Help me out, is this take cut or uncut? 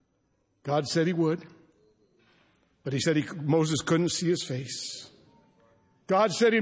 uncut